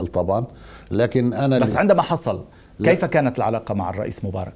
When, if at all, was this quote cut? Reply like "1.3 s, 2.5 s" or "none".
none